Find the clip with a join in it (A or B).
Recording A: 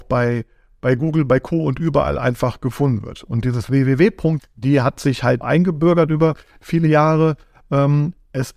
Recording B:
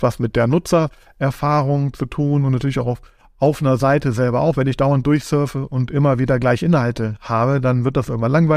A